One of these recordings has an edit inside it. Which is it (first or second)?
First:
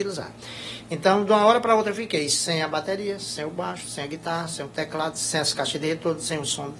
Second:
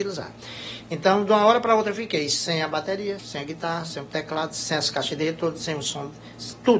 second